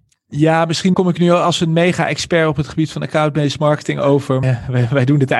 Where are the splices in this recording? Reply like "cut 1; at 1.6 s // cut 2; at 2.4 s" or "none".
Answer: cut 1; at 0.9 s // cut 2; at 4.4 s